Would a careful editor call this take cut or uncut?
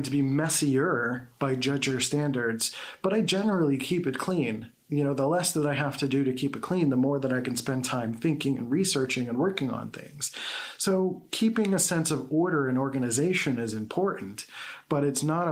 uncut